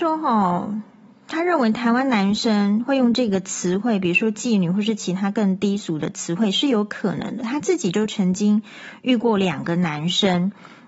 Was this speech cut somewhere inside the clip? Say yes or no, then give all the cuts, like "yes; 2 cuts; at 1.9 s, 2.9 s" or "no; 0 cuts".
no; 0 cuts